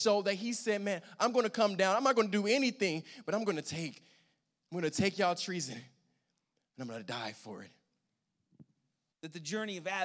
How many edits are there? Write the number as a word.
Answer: one